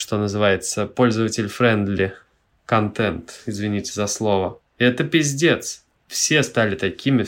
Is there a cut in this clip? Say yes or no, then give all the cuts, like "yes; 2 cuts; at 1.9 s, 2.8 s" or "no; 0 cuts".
no; 0 cuts